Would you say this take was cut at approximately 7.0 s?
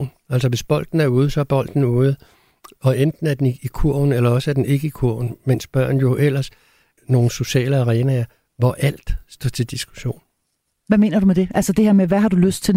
yes; 1 cut; at 7.0 s

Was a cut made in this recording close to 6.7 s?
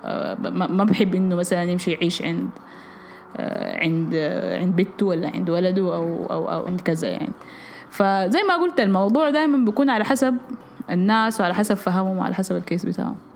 yes; 1 cut; at 6.7 s

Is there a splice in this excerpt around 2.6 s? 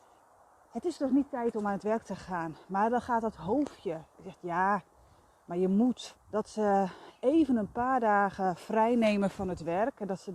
no; 1 cut; at 6.1 s

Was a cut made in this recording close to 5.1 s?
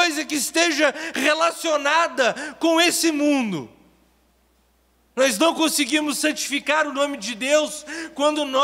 yes; 1 cut; at 5.1 s

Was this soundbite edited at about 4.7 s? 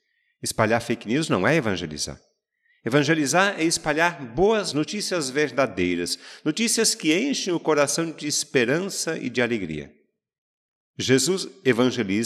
yes; 1 cut; at 4.7 s

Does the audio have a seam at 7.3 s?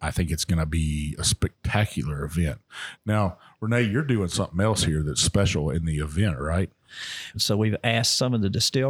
yes; 1 cut; at 7.3 s

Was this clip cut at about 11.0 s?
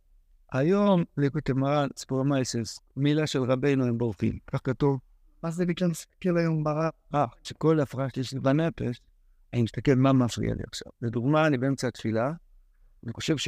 no; 1 cut; at 7.4 s

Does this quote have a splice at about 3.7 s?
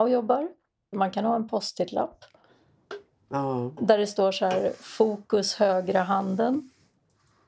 no; 1 cut; at 0.9 s

